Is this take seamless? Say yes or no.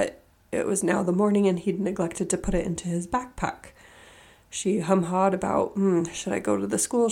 yes